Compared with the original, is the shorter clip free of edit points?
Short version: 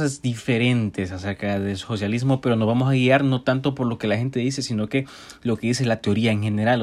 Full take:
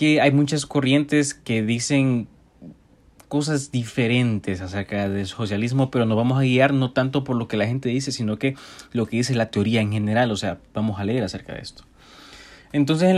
yes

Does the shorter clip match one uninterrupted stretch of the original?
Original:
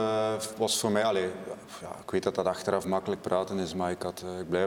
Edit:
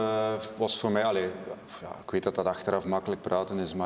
yes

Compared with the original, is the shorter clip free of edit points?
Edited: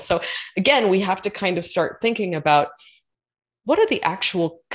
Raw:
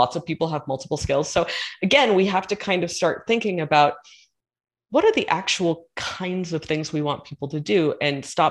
yes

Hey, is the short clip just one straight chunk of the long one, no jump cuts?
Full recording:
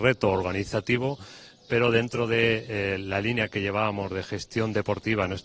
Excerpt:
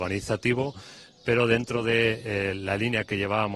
yes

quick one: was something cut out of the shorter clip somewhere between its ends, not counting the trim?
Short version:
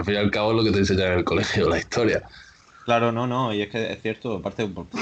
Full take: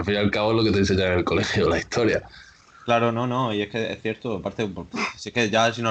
no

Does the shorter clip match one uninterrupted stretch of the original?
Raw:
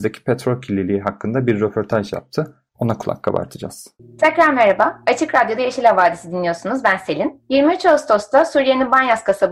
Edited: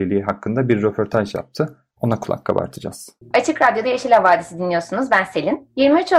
no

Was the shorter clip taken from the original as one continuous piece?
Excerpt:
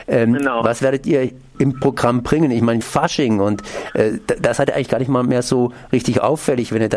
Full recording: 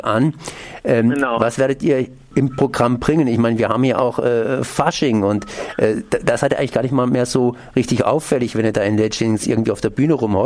no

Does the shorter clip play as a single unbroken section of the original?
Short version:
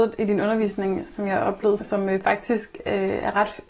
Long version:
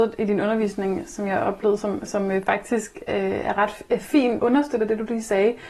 no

